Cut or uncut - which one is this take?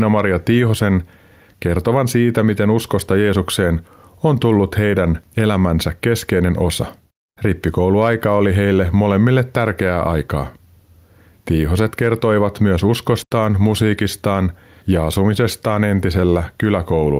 uncut